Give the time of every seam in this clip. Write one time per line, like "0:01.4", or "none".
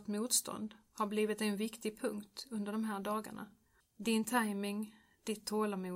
0:03.8